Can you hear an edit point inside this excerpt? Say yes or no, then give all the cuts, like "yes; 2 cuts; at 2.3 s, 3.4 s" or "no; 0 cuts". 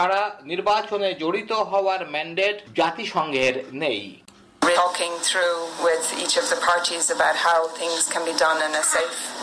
yes; 1 cut; at 4.7 s